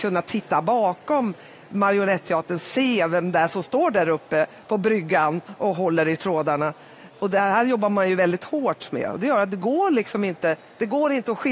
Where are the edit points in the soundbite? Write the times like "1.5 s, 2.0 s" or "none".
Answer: none